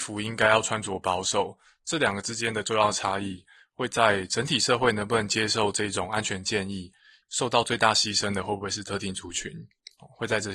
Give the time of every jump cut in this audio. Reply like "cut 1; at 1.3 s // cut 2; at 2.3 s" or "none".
cut 1; at 7.2 s